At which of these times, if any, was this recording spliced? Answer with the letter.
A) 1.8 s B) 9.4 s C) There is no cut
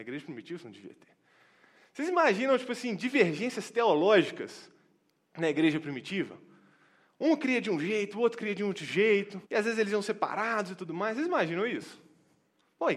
B